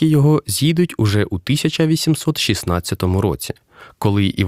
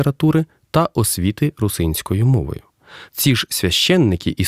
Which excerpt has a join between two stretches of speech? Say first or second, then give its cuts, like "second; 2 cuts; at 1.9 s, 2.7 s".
second; 1 cut; at 3.1 s